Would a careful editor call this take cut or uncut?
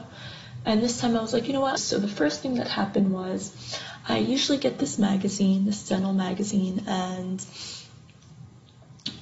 cut